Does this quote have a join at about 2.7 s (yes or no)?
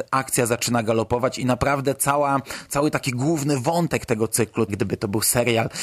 no